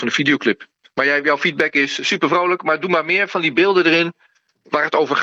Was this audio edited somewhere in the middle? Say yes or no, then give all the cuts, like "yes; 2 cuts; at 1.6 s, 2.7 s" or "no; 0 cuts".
no; 0 cuts